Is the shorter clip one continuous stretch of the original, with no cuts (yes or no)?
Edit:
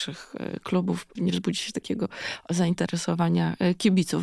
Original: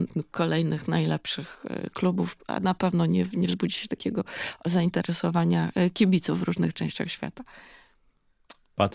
no